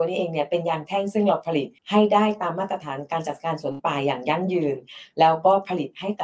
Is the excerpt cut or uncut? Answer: cut